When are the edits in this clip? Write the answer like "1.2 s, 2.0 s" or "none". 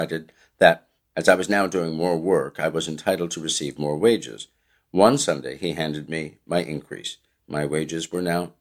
none